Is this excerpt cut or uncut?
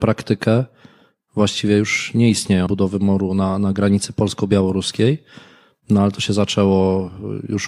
cut